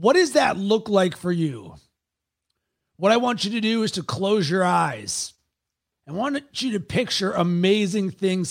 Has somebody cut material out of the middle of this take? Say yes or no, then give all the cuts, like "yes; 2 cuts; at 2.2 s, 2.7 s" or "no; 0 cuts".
yes; 1 cut; at 5.9 s